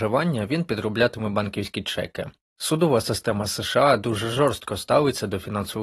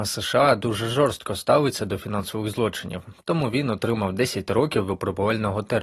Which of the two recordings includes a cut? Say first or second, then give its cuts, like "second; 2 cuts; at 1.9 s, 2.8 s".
first; 1 cut; at 2.4 s